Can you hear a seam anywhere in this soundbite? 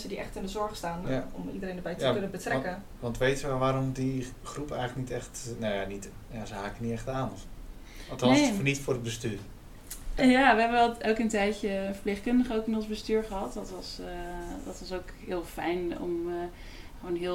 yes; 2 cuts; at 1.0 s, 10.2 s

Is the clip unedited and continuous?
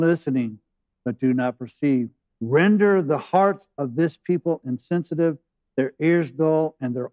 no; 1 cut; at 2.4 s

